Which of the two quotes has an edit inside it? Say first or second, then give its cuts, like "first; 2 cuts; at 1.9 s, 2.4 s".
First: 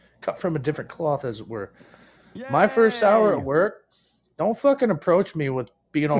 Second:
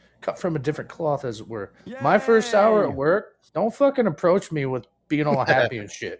second; 2 cuts; at 1.8 s, 3.5 s